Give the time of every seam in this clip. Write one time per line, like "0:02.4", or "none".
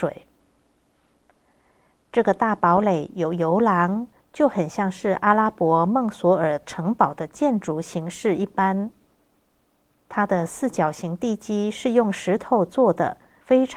0:04.2